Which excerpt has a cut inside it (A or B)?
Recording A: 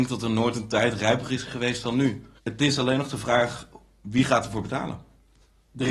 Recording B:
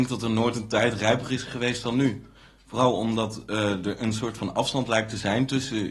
A